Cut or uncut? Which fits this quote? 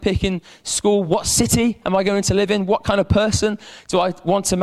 uncut